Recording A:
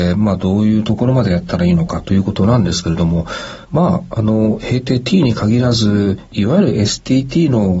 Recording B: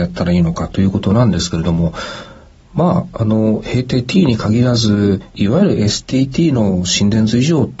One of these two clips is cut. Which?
A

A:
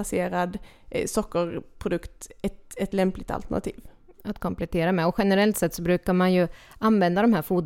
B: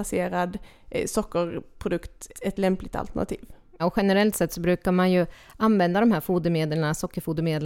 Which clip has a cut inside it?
B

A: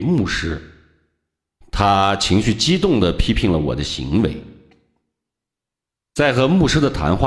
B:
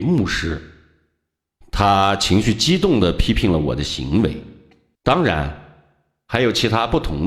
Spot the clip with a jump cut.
B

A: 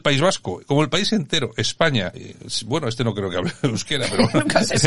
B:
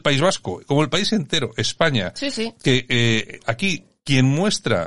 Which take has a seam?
A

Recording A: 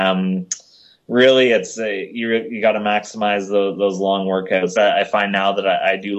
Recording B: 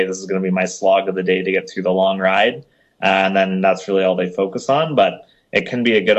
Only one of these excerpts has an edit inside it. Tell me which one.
A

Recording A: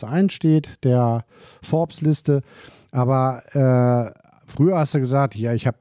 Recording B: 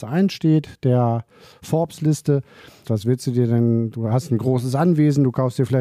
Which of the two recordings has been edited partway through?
B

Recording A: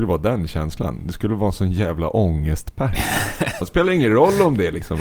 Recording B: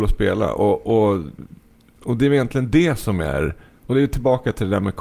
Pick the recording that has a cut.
A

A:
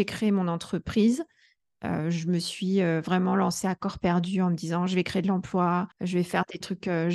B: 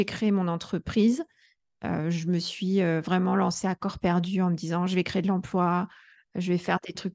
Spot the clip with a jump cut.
A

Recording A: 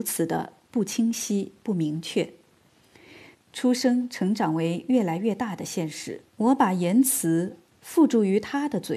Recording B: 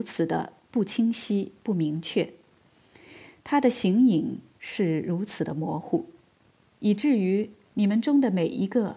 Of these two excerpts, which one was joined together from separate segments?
A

